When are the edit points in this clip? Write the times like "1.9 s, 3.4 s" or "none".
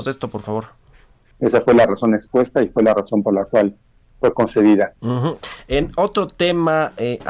1.3 s, 5.0 s